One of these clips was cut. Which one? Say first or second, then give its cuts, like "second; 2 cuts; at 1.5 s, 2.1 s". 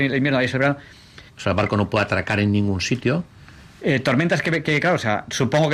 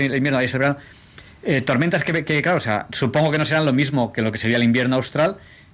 first; 2 cuts; at 1.3 s, 3.8 s